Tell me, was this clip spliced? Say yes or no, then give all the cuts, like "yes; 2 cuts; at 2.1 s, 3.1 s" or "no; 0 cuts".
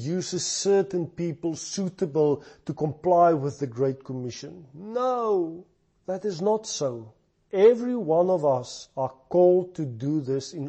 no; 0 cuts